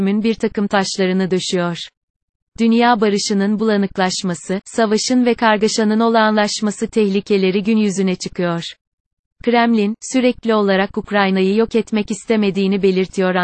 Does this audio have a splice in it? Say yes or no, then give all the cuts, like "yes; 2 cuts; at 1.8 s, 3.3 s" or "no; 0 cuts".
no; 0 cuts